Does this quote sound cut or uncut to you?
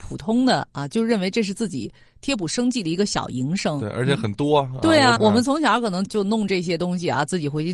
cut